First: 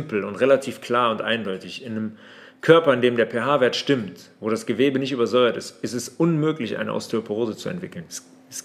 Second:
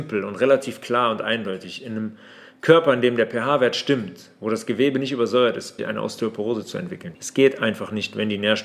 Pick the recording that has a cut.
second; 2 cuts; at 5.8 s, 7.1 s

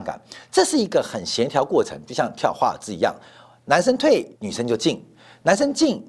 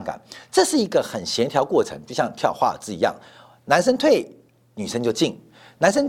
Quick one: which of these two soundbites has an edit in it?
first; 1 cut; at 4.3 s

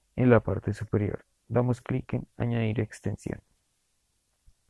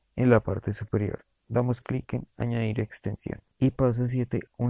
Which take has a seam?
second; 1 cut; at 3.5 s

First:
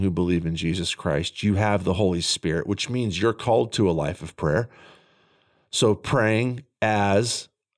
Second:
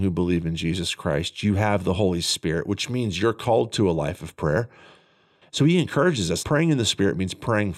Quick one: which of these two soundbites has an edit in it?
second; 2 cuts; at 5.4 s, 6.4 s

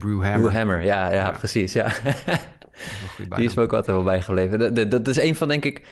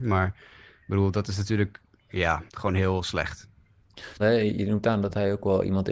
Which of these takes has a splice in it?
second; 2 cuts; at 2.5 s, 4.2 s

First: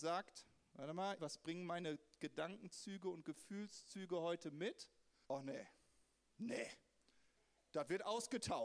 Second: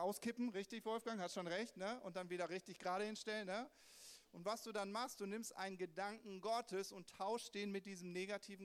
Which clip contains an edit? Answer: first; 2 cuts; at 1.2 s, 5.2 s

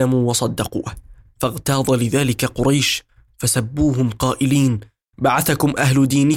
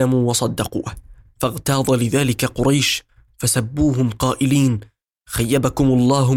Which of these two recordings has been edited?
first; 1 cut; at 5.1 s

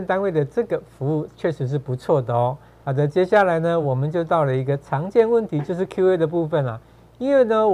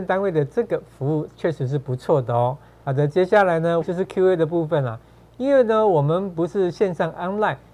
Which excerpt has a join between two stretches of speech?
second; 1 cut; at 3.8 s

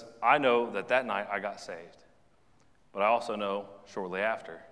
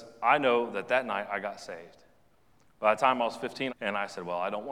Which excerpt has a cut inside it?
second; 2 cuts; at 2.7 s, 3.7 s

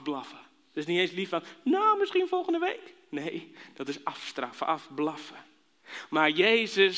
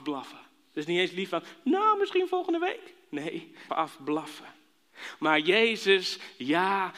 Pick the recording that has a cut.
second; 1 cut; at 3.7 s

